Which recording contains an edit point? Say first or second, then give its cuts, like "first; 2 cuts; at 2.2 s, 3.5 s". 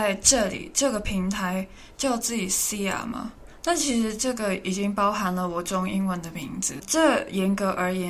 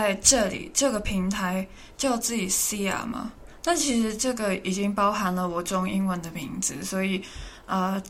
first; 1 cut; at 6.8 s